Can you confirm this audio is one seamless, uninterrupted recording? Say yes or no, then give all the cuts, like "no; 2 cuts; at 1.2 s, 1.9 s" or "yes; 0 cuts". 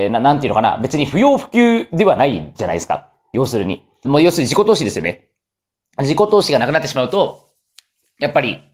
no; 1 cut; at 4.0 s